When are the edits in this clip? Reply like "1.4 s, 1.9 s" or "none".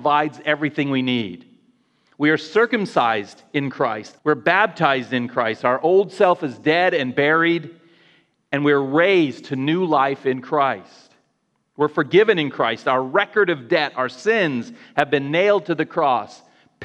4.2 s